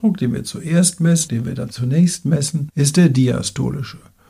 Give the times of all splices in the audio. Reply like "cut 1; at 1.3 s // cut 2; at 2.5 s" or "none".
cut 1; at 1.3 s